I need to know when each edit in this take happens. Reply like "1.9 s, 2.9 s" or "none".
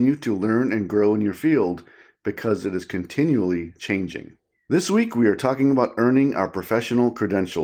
4.5 s